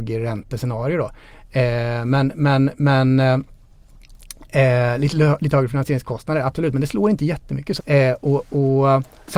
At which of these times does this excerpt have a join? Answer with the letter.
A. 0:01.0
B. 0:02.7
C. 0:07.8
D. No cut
C